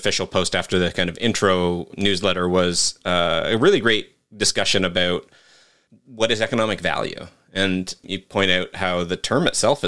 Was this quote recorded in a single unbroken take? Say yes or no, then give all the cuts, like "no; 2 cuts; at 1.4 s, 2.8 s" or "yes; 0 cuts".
yes; 0 cuts